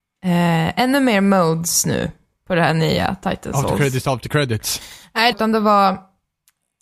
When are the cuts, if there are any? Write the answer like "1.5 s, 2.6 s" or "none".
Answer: 4.0 s, 5.3 s